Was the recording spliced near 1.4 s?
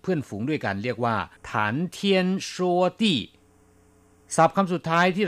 yes; 1 cut; at 1.4 s

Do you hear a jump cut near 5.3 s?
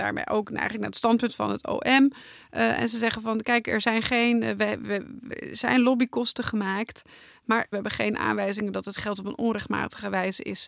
yes; 1 cut; at 5.3 s

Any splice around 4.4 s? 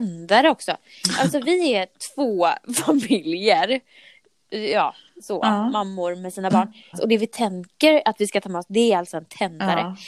no; 1 cut; at 6.9 s

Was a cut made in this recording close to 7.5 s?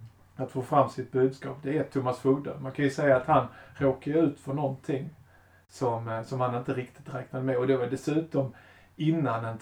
no; 0 cuts

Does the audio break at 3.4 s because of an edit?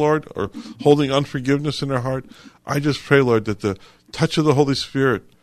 no; 0 cuts

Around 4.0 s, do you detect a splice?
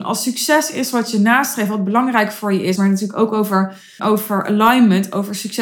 yes; 2 cuts; at 2.8 s, 4.0 s

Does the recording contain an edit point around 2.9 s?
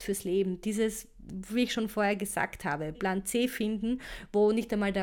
yes; 1 cut; at 2.9 s

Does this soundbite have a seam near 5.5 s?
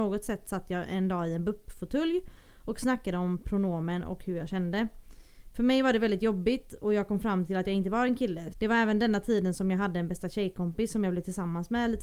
no; 1 cut; at 8.5 s

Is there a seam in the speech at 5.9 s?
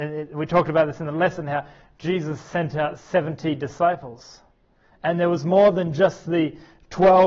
no; 0 cuts

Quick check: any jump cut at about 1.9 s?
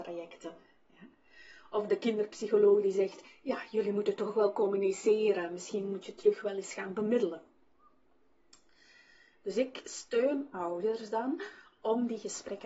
yes; 1 cut; at 1.9 s

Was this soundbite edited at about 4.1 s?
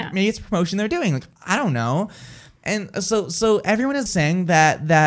yes; 1 cut; at 4.1 s

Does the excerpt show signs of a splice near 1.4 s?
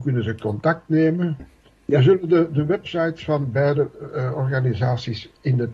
yes; 1 cut; at 1.4 s

